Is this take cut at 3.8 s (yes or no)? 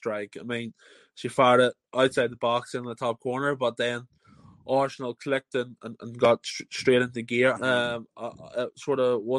no